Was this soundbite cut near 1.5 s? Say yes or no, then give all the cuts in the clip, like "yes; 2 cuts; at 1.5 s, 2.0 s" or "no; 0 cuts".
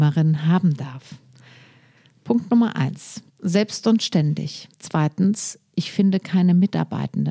no; 2 cuts; at 3.3 s, 4.7 s